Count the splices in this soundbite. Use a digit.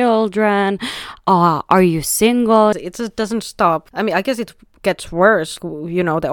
1